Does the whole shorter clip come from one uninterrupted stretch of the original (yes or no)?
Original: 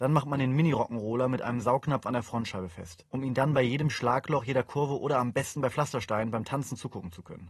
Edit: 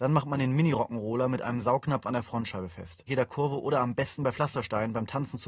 no